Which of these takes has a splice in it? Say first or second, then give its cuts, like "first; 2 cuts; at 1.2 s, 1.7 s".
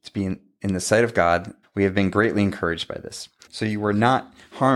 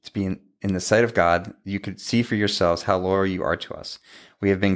first; 2 cuts; at 1.6 s, 3.5 s